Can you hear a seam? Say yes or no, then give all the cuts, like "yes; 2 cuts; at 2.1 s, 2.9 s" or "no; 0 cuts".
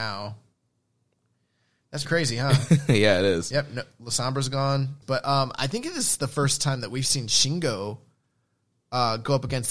yes; 2 cuts; at 2.0 s, 5.0 s